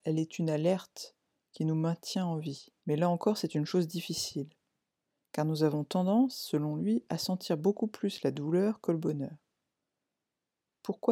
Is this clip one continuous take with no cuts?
no; 1 cut; at 2.8 s

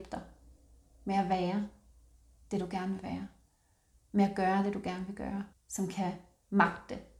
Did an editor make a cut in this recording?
yes; 1 cut; at 5.5 s

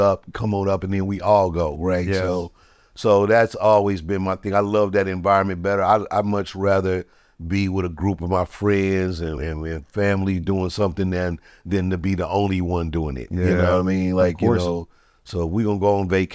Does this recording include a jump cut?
no; 0 cuts

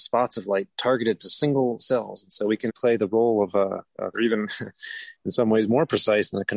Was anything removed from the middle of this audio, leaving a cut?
yes; 2 cuts; at 2.7 s, 4.1 s

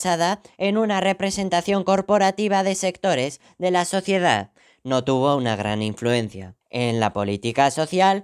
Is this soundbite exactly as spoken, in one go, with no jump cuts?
no; 1 cut; at 6.6 s

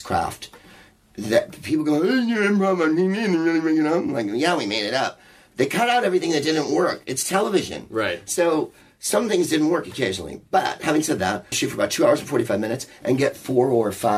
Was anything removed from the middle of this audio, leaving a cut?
yes; 1 cut; at 11.5 s

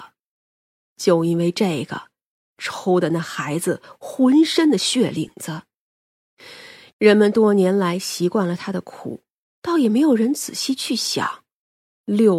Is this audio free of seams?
no; 2 cuts; at 2.4 s, 6.9 s

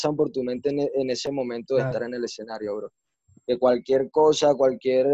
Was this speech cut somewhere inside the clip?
no; 0 cuts

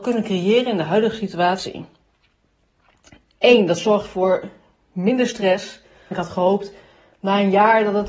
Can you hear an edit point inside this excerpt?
yes; 1 cut; at 6.1 s

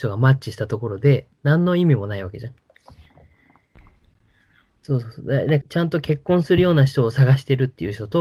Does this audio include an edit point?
yes; 1 cut; at 5.6 s

